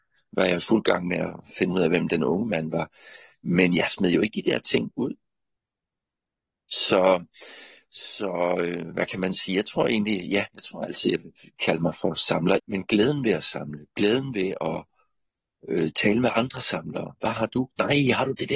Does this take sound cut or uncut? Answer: cut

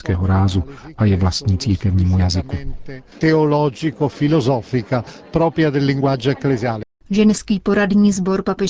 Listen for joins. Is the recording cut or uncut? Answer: uncut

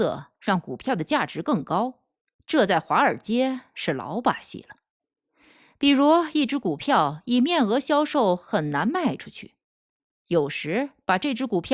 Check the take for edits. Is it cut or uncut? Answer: uncut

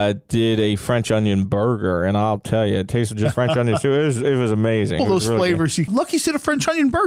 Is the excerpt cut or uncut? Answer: cut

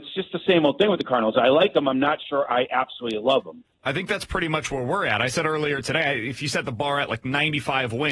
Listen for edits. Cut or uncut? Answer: uncut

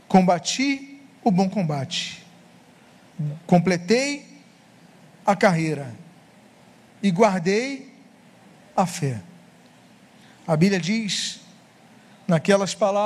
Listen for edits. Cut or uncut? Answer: cut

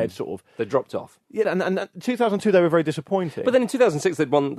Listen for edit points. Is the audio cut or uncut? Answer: cut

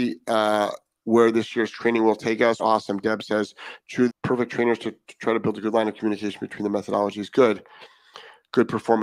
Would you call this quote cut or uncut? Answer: cut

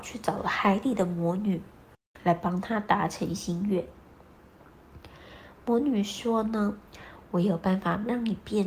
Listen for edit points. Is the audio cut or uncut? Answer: uncut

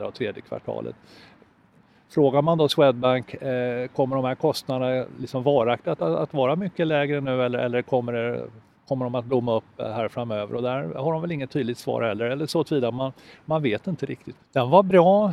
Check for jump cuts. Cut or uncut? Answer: cut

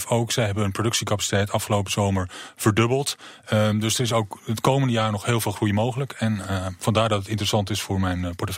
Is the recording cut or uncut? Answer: uncut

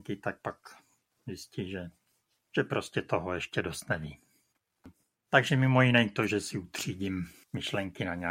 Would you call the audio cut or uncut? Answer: uncut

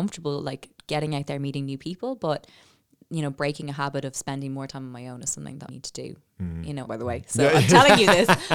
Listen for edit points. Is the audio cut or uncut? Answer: cut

